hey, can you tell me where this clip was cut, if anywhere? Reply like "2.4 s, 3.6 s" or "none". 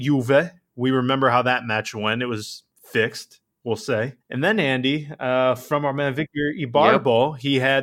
4.2 s